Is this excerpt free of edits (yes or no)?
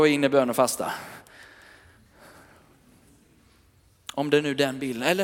yes